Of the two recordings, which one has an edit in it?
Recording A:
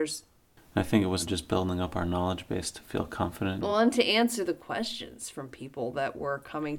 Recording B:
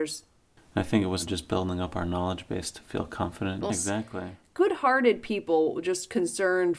B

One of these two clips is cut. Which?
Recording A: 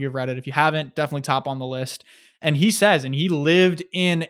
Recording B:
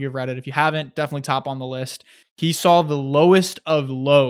B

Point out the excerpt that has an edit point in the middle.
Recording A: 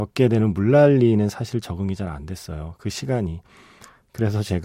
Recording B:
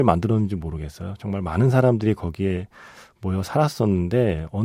A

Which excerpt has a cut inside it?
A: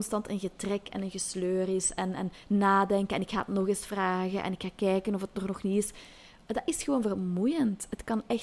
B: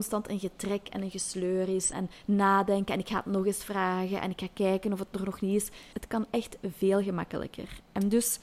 B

